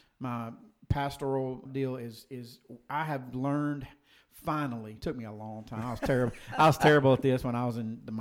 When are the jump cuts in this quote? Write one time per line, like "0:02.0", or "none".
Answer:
0:01.7